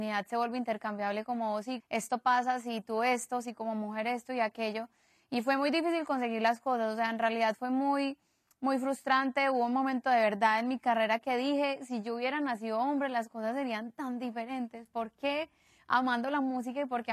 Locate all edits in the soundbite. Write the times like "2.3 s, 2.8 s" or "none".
1.8 s